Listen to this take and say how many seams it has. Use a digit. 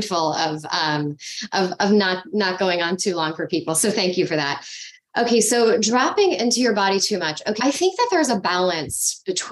1